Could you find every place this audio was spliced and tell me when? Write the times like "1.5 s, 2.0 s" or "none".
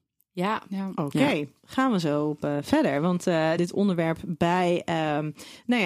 3.6 s

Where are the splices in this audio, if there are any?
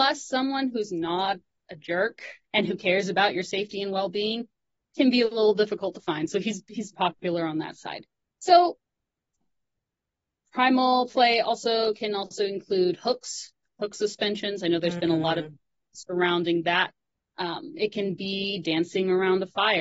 6.9 s

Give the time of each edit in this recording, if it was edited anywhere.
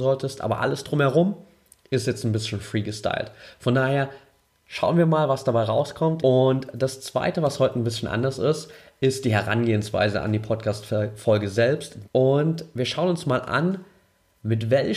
6.2 s, 12.0 s

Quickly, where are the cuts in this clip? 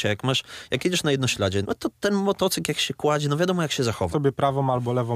1.6 s, 4.1 s

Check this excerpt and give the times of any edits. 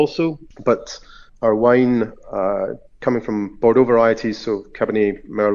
none

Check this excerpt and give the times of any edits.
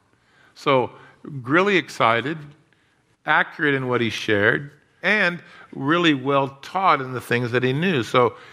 5.0 s

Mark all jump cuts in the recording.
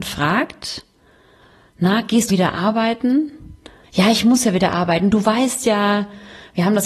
2.3 s, 3.8 s

